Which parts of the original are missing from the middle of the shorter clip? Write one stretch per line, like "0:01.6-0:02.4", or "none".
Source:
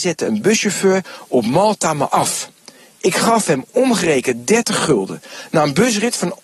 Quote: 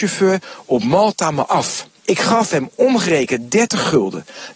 0:02.6-0:02.9